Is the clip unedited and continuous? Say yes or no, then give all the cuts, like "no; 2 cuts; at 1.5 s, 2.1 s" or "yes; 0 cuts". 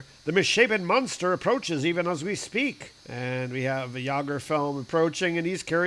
no; 1 cut; at 3.0 s